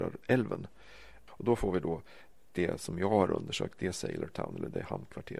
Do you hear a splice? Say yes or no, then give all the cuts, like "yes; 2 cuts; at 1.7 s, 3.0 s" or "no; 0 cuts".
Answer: yes; 1 cut; at 1.3 s